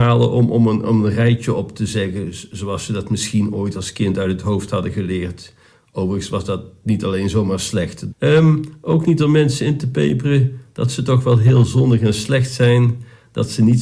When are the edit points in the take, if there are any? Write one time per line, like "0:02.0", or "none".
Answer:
0:08.1